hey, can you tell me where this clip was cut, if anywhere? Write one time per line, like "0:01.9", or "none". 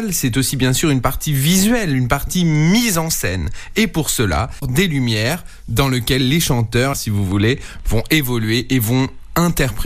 0:04.6
0:06.9